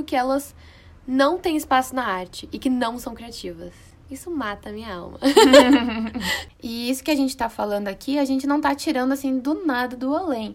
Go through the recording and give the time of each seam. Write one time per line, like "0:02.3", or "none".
none